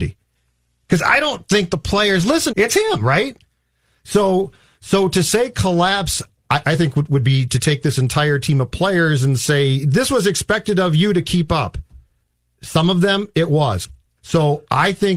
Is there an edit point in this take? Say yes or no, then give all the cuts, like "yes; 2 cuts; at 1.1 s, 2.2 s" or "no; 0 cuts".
yes; 2 cuts; at 2.5 s, 14.2 s